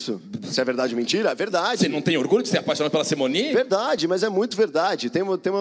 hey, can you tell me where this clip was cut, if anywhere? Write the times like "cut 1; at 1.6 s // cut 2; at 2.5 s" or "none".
none